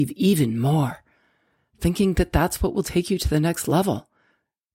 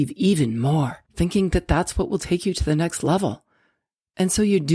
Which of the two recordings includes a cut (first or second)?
second